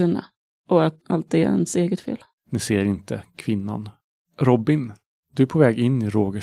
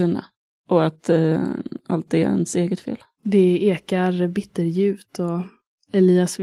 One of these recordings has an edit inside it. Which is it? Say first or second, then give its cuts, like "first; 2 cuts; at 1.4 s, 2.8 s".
first; 2 cuts; at 1.0 s, 2.3 s